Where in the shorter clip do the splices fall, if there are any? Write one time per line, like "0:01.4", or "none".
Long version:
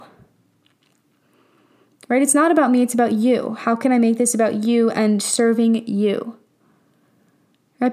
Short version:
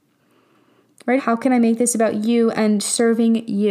0:01.2